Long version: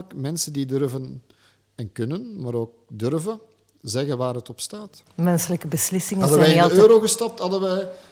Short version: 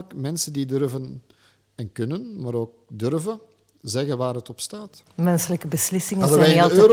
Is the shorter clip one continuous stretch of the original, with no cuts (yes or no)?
yes